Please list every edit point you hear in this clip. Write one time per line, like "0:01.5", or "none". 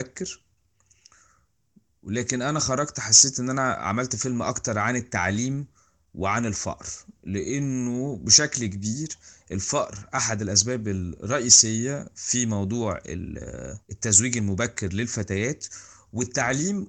0:13.8